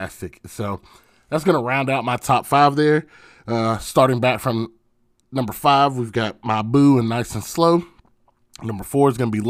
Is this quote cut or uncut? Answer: uncut